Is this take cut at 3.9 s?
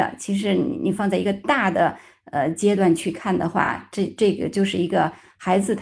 no; 0 cuts

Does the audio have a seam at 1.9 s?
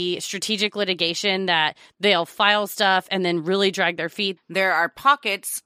no; 1 cut; at 4.4 s

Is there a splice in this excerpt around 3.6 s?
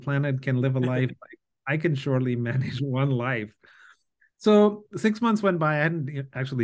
no; 0 cuts

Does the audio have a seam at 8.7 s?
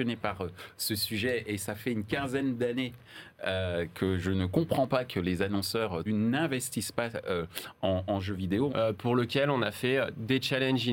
yes; 2 cuts; at 6.1 s, 8.7 s

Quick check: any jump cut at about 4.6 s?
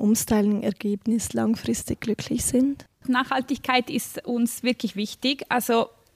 yes; 1 cut; at 4.6 s

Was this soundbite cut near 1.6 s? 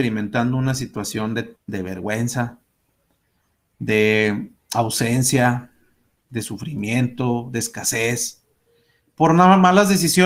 yes; 1 cut; at 1.6 s

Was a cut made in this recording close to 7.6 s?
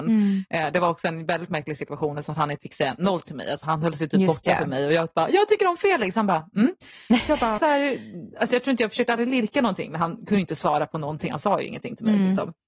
yes; 1 cut; at 7.6 s

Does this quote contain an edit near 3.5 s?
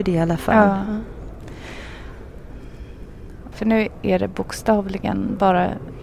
yes; 1 cut; at 3.5 s

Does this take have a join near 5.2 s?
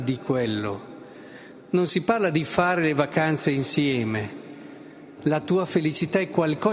yes; 1 cut; at 5.2 s

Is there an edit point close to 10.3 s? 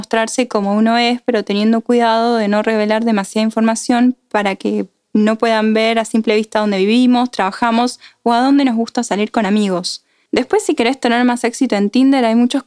yes; 1 cut; at 10.3 s

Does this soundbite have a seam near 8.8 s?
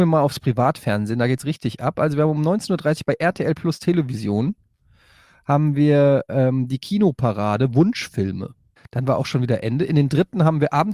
yes; 1 cut; at 8.8 s

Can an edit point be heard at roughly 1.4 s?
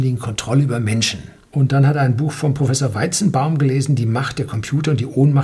yes; 1 cut; at 1.4 s

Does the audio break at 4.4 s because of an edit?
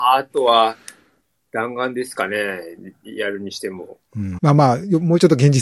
yes; 1 cut; at 4.4 s

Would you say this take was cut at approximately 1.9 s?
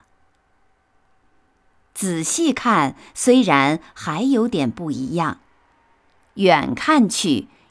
no; 0 cuts

